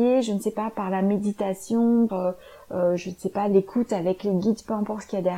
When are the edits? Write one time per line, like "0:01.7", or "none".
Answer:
0:02.1